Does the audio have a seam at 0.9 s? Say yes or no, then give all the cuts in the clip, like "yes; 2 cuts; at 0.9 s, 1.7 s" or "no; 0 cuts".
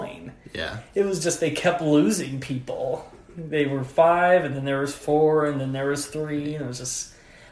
no; 0 cuts